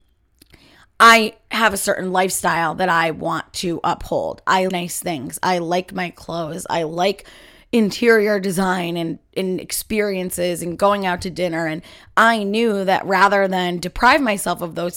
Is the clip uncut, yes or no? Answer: no